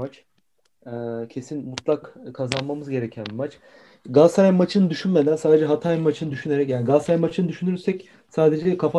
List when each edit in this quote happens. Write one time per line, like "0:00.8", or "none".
none

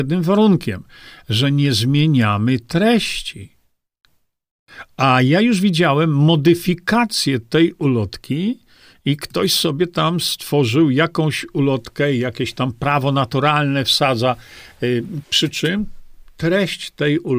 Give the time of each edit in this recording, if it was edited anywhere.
0:15.2

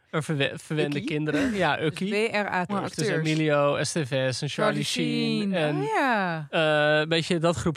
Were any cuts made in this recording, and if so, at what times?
0:02.7

